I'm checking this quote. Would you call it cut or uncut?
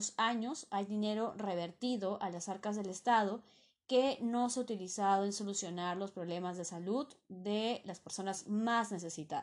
uncut